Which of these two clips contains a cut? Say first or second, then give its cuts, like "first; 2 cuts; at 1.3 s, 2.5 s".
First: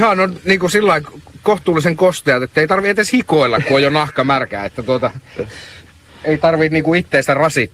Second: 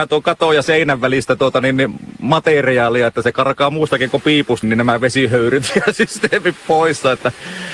second; 1 cut; at 4.6 s